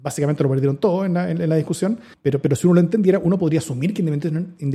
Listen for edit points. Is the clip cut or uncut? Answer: cut